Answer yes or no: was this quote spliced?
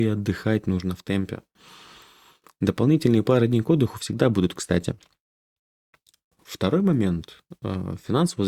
no